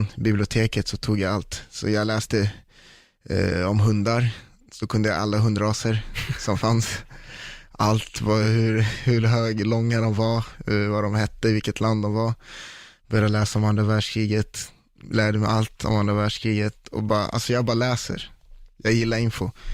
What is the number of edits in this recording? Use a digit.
0